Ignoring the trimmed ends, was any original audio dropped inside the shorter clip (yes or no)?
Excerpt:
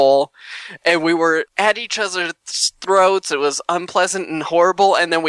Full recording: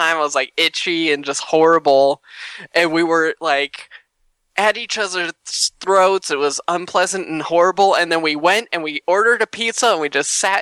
yes